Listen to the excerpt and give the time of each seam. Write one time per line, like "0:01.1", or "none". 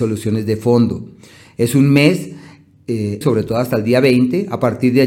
0:03.2